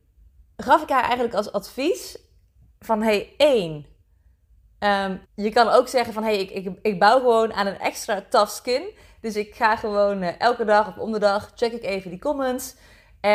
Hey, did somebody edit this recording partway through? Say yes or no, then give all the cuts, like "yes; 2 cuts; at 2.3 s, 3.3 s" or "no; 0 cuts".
yes; 1 cut; at 5.2 s